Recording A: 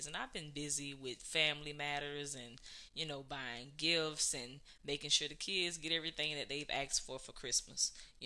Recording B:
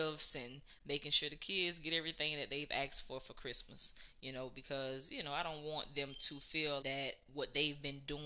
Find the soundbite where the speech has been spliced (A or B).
B